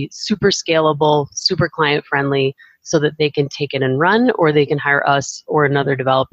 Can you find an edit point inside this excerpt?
no; 0 cuts

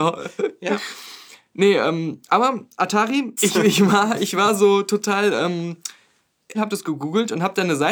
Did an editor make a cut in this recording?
yes; 2 cuts; at 3.4 s, 6.5 s

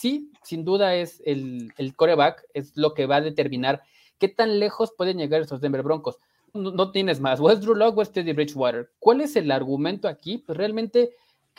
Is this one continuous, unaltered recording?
no; 1 cut; at 6.5 s

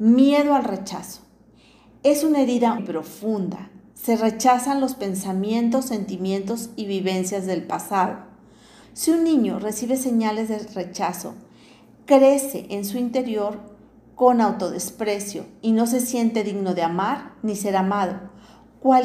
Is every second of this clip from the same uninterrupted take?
no; 2 cuts; at 2.8 s, 8.8 s

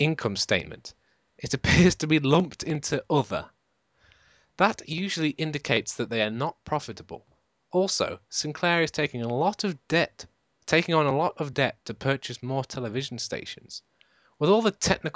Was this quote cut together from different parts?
no; 0 cuts

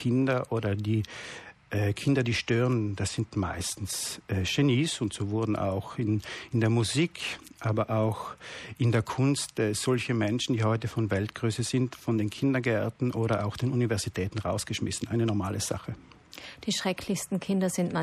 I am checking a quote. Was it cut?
no; 0 cuts

